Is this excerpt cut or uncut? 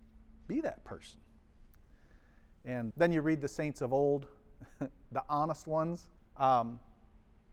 cut